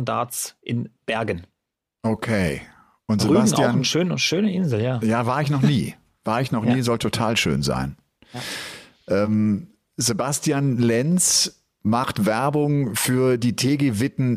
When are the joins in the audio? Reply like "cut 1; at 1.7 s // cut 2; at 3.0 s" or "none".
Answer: none